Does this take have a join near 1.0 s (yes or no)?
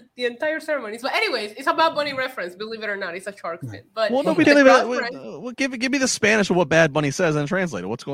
no